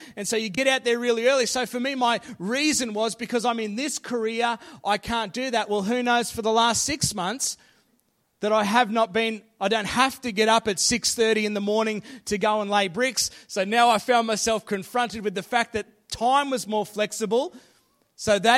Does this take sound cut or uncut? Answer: uncut